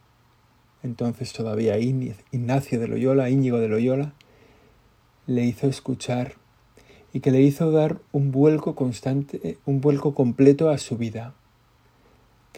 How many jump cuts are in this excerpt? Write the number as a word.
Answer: zero